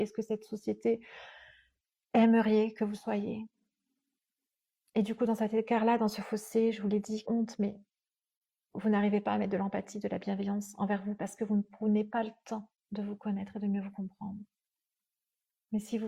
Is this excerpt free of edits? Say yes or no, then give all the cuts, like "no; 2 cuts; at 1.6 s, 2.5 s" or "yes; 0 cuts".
no; 2 cuts; at 7.2 s, 12.8 s